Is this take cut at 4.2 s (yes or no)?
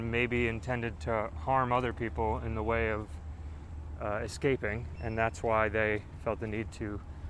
no